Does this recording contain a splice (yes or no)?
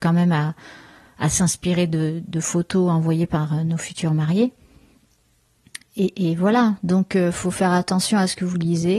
no